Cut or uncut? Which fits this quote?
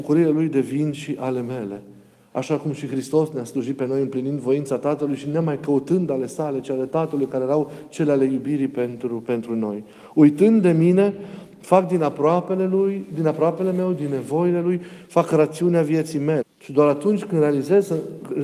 cut